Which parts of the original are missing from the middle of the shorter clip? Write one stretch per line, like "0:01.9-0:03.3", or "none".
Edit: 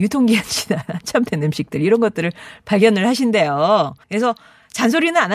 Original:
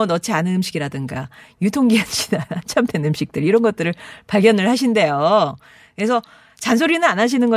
0:05.7-0:05.9